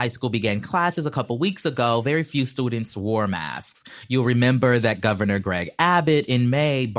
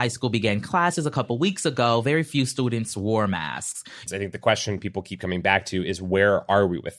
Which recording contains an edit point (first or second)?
second